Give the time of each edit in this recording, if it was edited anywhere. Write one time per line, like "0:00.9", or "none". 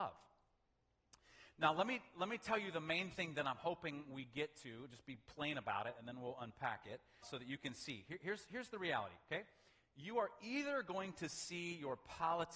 0:07.2